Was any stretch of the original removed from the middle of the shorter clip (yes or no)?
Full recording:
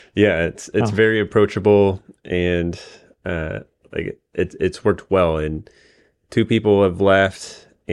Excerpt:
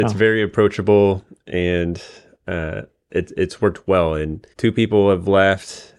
yes